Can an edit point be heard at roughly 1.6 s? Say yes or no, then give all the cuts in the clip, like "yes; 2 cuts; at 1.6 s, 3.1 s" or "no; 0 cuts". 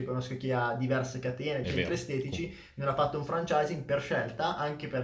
yes; 1 cut; at 1.6 s